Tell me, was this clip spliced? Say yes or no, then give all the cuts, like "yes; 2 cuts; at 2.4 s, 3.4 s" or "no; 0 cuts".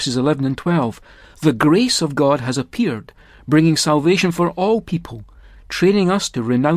no; 0 cuts